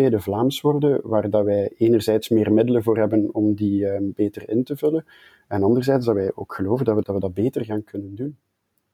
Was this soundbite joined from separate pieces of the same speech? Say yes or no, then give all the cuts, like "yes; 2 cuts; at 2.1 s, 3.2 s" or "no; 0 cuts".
yes; 1 cut; at 7.0 s